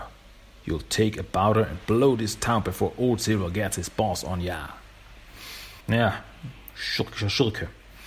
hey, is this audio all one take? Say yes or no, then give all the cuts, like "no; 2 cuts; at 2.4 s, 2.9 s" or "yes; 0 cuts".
no; 1 cut; at 5.8 s